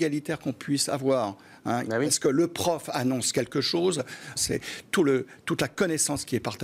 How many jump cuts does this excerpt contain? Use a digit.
2